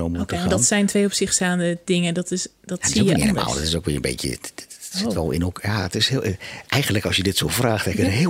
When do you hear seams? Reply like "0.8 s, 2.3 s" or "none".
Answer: none